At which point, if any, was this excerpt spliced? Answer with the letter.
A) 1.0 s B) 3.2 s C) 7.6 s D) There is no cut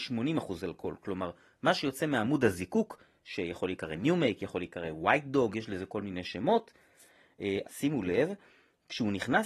C